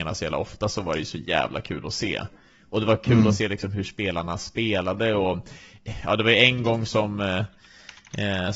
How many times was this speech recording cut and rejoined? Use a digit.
0